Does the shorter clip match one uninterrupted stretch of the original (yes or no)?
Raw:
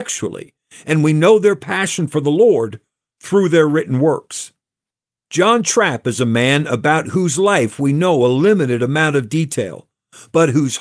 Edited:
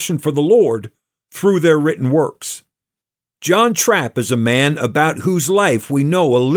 yes